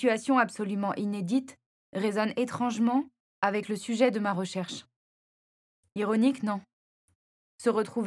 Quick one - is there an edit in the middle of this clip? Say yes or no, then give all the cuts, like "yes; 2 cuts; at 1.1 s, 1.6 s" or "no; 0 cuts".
no; 0 cuts